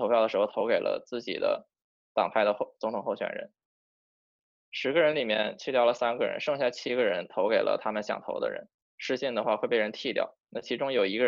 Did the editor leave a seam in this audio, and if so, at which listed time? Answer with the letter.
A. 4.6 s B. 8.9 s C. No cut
B